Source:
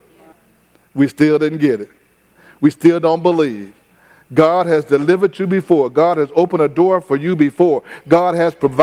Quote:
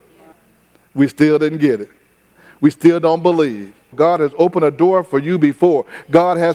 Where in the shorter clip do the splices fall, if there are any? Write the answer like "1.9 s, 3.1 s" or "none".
3.9 s